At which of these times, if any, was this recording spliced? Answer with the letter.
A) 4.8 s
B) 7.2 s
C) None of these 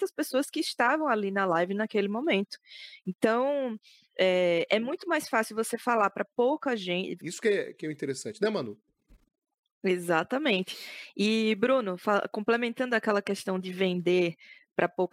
B